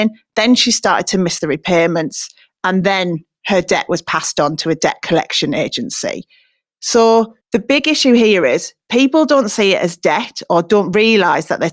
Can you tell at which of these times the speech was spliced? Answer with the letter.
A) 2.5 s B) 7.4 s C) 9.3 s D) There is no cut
B